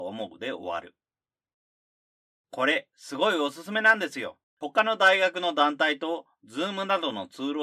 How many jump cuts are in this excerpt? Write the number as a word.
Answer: two